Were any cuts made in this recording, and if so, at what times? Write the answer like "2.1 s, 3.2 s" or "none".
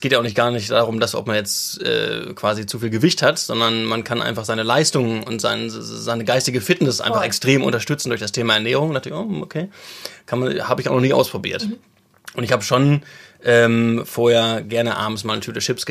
none